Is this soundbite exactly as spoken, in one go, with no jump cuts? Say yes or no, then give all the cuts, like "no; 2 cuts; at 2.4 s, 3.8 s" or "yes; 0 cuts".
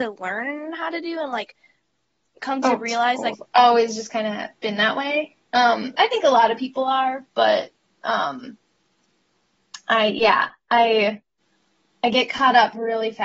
no; 1 cut; at 3.3 s